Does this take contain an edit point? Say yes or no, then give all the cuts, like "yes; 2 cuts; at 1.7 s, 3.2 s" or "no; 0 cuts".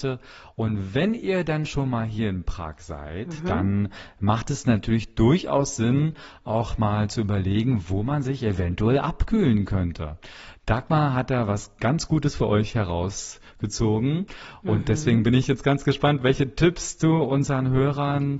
no; 0 cuts